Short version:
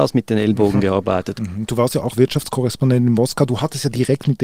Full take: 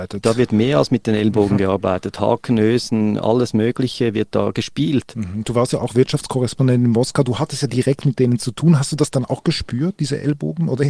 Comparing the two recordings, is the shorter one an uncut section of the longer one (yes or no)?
no